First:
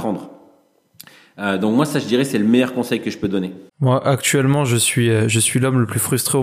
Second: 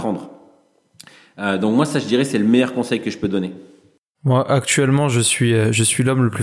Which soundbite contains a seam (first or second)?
first